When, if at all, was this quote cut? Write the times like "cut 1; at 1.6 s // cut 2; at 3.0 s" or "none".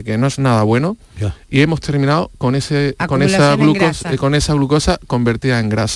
none